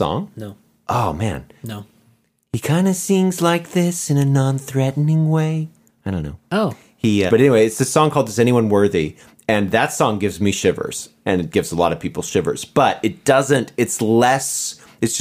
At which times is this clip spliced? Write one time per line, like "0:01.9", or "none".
0:01.6
0:07.3